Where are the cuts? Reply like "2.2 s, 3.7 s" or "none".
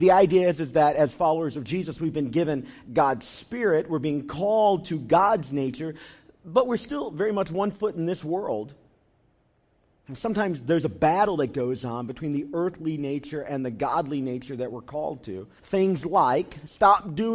15.6 s